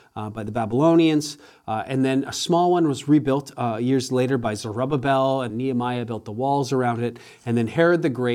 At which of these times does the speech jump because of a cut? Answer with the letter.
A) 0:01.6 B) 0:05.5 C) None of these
B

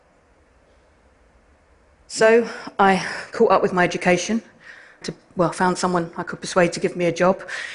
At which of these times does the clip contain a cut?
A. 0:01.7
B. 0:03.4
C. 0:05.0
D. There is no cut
C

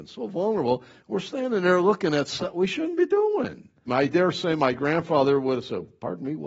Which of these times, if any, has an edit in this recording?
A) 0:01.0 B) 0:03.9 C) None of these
B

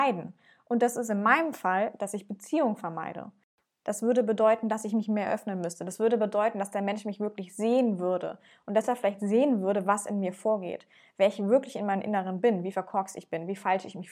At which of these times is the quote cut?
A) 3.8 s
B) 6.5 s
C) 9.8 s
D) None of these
A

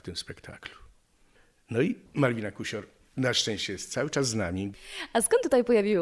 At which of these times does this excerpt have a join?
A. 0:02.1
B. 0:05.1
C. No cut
A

